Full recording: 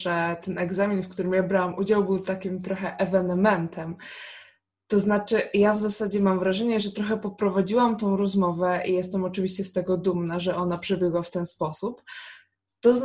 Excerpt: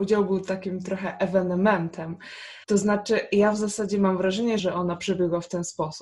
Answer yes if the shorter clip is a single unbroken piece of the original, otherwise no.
no